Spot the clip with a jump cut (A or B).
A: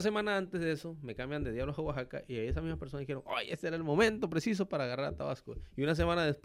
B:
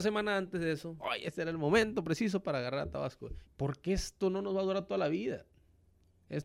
B